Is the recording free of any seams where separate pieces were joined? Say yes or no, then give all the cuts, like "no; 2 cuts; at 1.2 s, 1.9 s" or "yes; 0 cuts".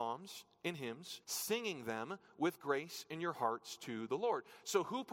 no; 1 cut; at 1.2 s